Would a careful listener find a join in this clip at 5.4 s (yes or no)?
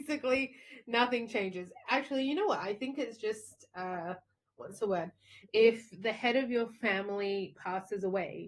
yes